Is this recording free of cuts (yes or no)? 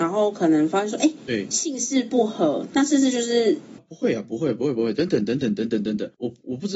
no